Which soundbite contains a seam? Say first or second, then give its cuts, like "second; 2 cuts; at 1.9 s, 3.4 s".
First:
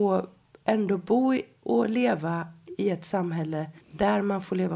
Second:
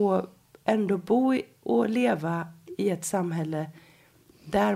first; 1 cut; at 3.8 s